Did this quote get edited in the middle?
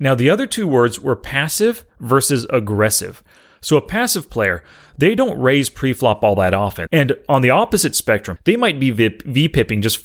yes; 2 cuts; at 6.9 s, 8.4 s

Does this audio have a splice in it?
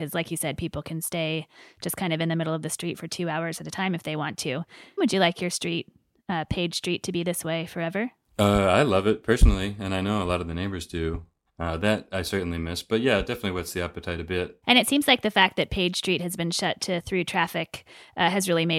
yes; 3 cuts; at 5.0 s, 11.5 s, 14.6 s

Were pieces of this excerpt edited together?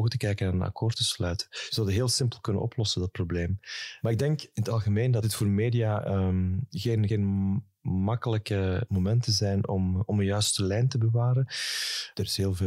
no; 0 cuts

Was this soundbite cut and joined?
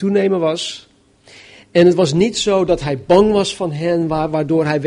no; 0 cuts

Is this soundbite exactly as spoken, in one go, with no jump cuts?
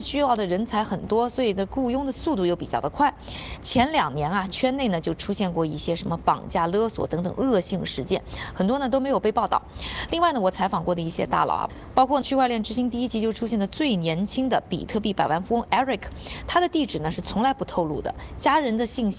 no; 1 cut; at 3.6 s

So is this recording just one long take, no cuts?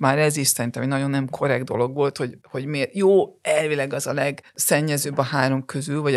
no; 1 cut; at 4.5 s

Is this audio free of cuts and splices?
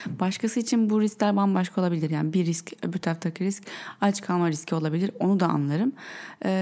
yes; 0 cuts

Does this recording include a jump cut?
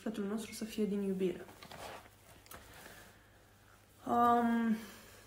no; 0 cuts

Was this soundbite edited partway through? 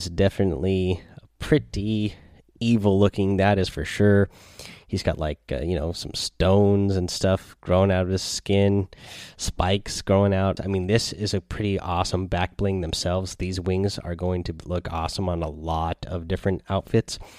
yes; 1 cut; at 10.6 s

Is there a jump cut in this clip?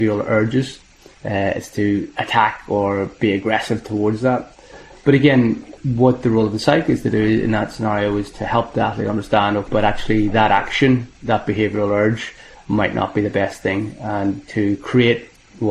yes; 3 cuts; at 1.1 s, 5.8 s, 9.7 s

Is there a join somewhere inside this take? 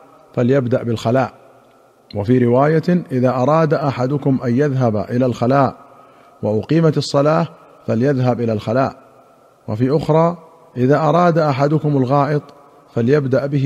no; 0 cuts

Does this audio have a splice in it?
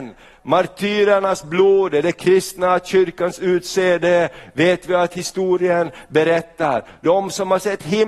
no; 0 cuts

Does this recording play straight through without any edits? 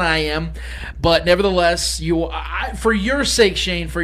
yes; 0 cuts

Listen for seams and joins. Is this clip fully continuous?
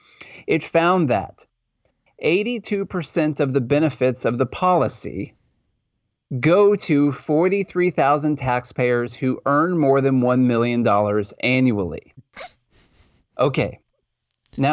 yes; 0 cuts

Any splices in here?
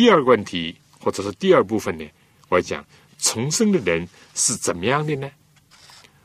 yes; 1 cut; at 2.6 s

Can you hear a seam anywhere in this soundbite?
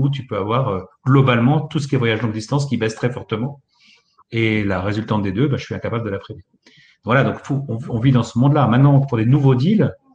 no; 0 cuts

